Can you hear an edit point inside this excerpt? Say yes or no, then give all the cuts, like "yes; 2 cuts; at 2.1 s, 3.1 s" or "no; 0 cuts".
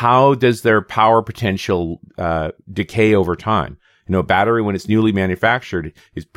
no; 0 cuts